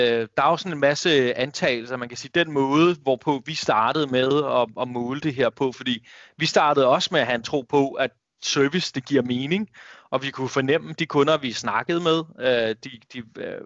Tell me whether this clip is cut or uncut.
uncut